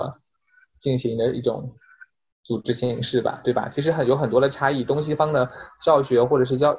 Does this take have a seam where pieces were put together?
no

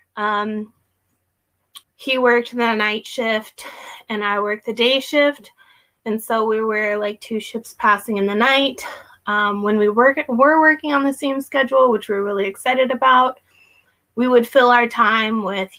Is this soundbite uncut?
no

